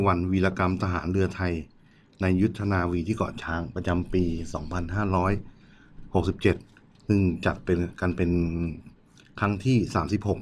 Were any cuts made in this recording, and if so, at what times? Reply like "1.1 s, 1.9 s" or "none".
none